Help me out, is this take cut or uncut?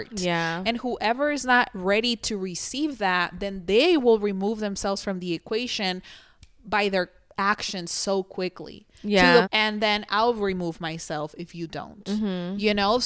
cut